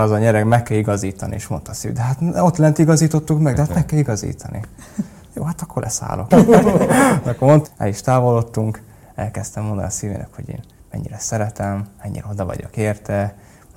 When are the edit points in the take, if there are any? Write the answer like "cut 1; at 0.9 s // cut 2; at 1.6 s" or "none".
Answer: cut 1; at 6.3 s // cut 2; at 7.6 s